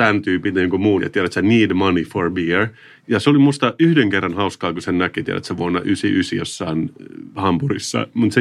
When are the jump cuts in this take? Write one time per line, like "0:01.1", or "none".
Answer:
0:01.0